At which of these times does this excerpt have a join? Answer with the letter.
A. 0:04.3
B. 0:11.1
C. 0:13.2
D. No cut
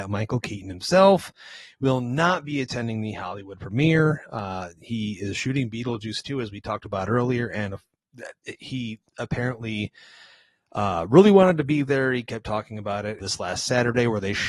C